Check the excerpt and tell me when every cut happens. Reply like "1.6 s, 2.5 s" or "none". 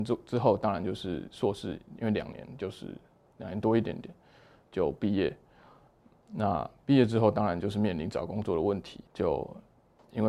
9.1 s